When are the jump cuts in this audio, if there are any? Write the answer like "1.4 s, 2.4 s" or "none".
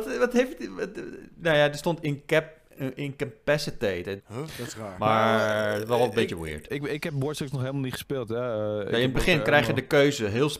4.2 s, 6.7 s